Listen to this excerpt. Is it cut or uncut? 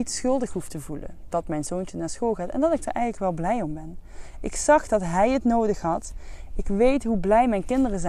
uncut